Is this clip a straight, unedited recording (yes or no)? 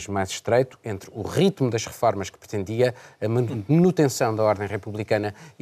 yes